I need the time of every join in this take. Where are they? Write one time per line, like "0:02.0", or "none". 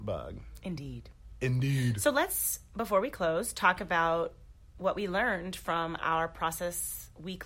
none